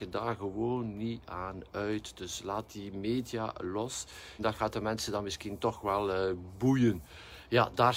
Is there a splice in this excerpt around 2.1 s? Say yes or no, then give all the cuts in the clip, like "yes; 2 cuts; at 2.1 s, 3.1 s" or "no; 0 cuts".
no; 1 cut; at 4.4 s